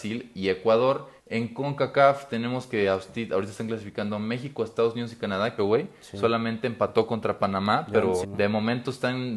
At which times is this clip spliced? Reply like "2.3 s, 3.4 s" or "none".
1.2 s, 5.6 s, 8.2 s